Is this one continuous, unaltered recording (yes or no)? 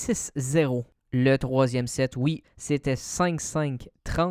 no